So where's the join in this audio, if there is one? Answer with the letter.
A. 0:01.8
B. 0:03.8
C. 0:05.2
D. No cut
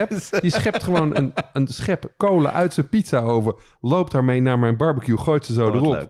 D